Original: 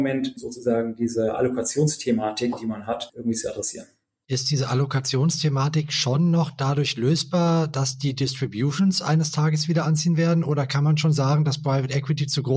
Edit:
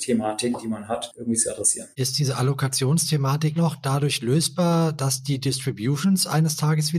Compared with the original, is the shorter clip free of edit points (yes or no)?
no